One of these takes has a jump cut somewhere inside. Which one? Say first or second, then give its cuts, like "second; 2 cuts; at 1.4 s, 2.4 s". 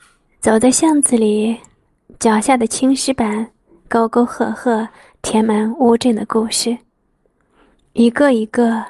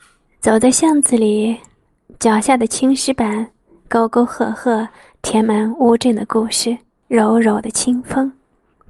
second; 1 cut; at 7.0 s